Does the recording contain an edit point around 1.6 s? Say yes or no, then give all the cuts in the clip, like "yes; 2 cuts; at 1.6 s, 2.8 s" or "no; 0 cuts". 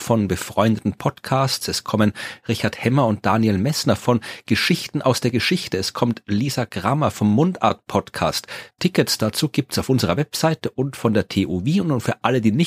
no; 1 cut; at 8.8 s